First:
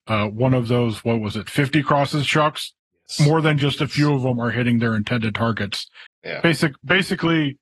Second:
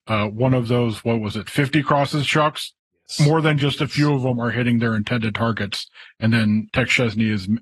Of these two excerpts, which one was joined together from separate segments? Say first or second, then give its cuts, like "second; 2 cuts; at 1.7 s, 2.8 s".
first; 1 cut; at 6.1 s